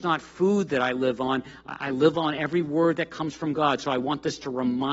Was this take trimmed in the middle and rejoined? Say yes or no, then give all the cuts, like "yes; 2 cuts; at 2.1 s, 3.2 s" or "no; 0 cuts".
no; 0 cuts